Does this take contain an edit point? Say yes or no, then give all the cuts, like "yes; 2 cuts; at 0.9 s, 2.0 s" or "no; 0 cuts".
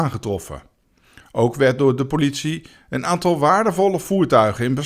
no; 0 cuts